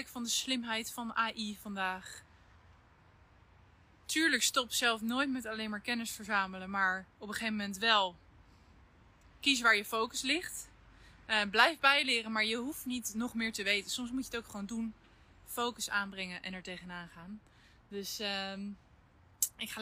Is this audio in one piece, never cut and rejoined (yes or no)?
yes